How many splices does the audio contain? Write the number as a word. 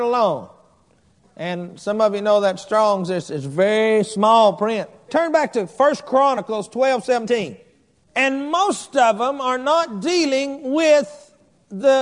two